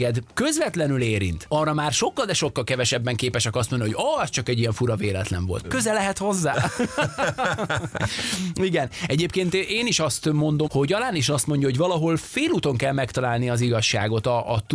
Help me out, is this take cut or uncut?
cut